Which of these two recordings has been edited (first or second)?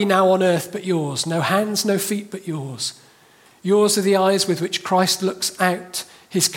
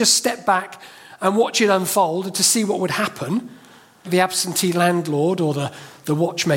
second